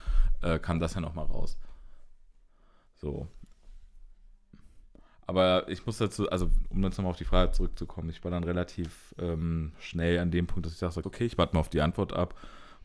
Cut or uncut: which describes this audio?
cut